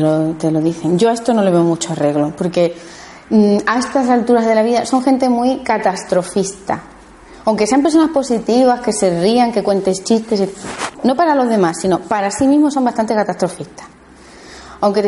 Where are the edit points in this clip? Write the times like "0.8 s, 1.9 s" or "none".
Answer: 10.9 s